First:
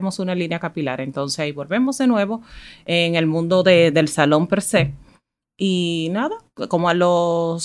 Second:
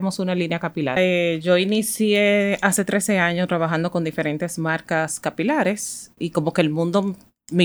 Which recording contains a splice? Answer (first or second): second